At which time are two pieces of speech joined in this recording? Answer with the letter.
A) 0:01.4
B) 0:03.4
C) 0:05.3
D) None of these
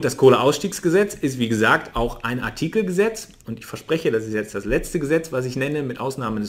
B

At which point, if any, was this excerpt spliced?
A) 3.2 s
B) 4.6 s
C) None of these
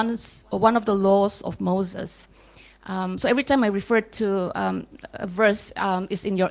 C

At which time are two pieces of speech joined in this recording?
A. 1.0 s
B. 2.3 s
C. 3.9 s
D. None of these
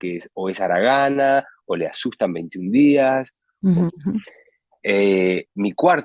C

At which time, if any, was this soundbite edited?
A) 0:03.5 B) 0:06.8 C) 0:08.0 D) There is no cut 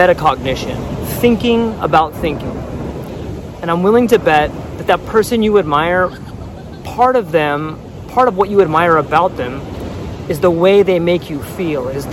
A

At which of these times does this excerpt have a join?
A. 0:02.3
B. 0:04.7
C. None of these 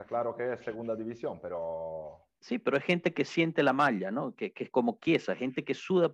B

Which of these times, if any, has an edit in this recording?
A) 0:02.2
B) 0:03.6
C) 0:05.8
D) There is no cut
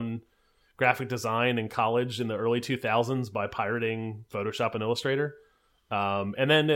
D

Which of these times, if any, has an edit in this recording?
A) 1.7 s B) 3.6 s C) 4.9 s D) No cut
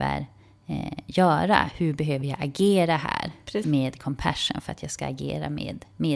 B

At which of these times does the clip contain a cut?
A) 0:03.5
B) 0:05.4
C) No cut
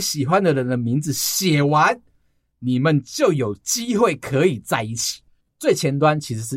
B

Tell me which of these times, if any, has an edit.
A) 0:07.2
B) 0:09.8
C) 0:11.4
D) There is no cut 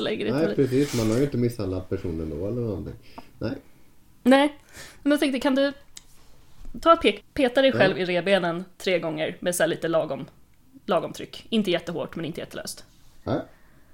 A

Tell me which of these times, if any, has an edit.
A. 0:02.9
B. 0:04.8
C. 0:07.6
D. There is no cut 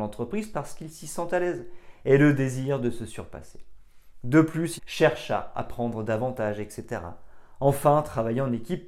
B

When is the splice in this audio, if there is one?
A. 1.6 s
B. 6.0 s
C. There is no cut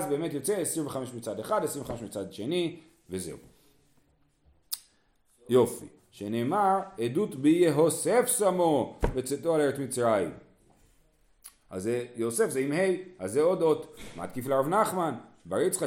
B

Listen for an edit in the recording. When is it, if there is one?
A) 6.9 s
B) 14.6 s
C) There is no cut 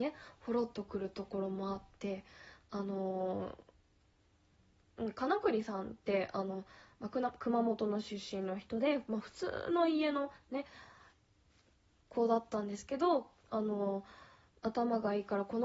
B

